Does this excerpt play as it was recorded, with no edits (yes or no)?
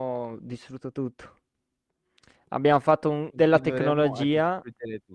no